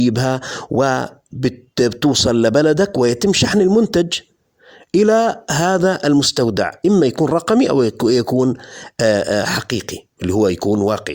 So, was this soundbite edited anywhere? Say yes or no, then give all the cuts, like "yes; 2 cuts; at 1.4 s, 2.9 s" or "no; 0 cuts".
no; 0 cuts